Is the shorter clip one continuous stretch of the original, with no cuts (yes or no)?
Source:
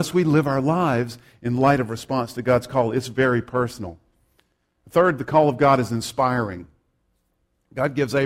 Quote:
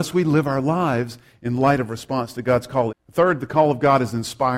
no